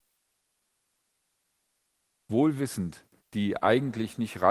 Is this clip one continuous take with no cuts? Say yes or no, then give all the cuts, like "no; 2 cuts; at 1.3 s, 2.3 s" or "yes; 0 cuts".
no; 1 cut; at 3.3 s